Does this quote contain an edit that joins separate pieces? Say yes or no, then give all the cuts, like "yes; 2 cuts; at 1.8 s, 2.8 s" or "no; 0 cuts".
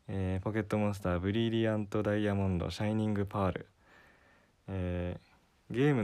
no; 0 cuts